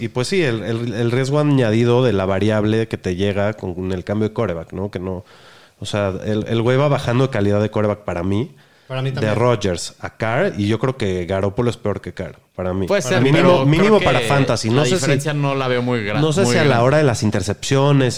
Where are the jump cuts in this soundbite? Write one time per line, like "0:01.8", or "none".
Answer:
none